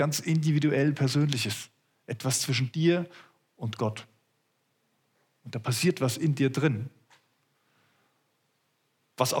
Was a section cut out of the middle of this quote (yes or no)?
no